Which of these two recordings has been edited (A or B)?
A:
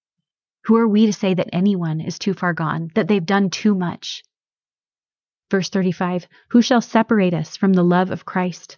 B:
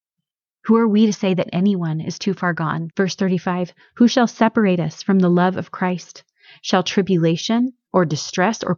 B